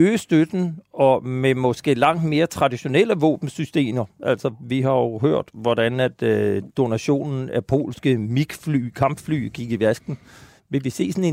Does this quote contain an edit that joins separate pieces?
no; 0 cuts

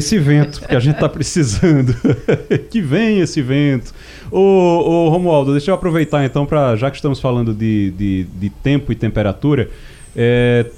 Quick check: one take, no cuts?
yes; 0 cuts

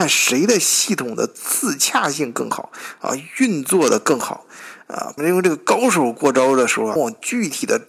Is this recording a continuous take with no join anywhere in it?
no; 2 cuts; at 5.2 s, 7.0 s

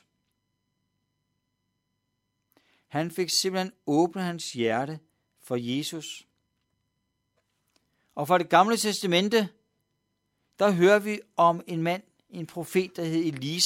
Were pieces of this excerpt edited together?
no; 0 cuts

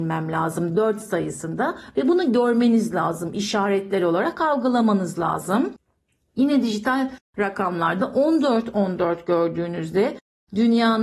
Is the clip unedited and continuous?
yes; 0 cuts

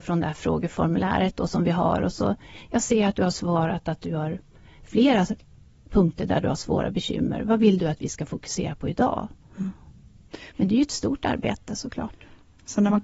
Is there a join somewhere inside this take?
yes; 1 cut; at 10.5 s

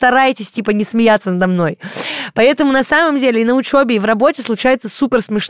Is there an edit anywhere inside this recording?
no; 0 cuts

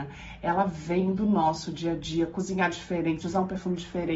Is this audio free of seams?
no; 1 cut; at 3.2 s

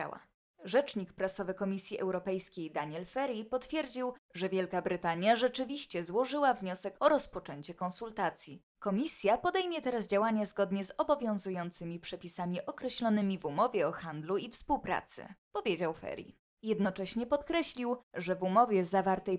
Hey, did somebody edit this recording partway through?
no; 0 cuts

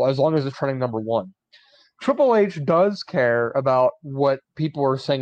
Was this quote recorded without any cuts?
yes; 0 cuts

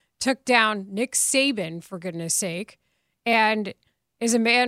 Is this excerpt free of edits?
yes; 0 cuts

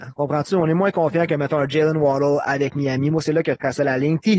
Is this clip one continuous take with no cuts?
yes; 0 cuts

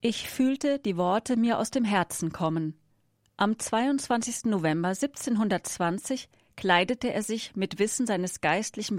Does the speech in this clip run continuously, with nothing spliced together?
no; 1 cut; at 3.2 s

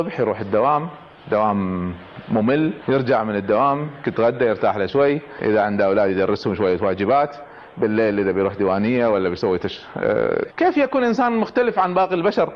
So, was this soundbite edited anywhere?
yes; 1 cut; at 10.4 s

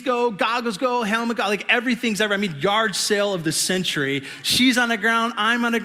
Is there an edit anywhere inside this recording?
no; 0 cuts

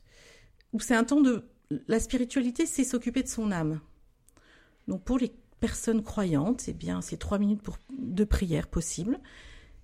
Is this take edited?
no; 0 cuts

